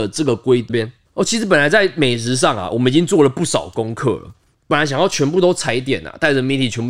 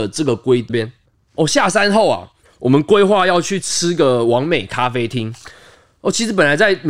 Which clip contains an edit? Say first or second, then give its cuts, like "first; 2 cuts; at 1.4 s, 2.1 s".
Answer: first; 1 cut; at 1.0 s